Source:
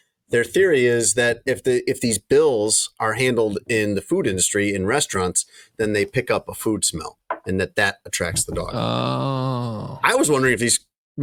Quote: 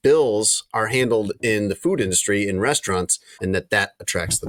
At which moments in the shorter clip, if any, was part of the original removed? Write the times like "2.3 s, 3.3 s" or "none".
3.4 s